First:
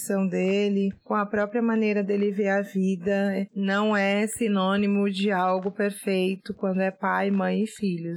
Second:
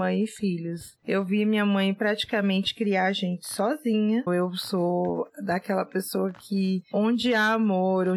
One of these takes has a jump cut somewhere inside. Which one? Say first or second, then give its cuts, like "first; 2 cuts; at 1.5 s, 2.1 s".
second; 2 cuts; at 1.0 s, 4.3 s